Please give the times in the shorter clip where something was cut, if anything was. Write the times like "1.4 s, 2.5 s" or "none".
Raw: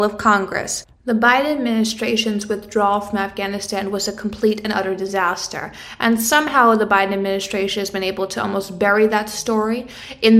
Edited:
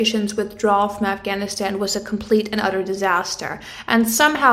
none